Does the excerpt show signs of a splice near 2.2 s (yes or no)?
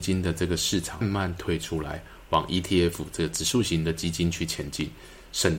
no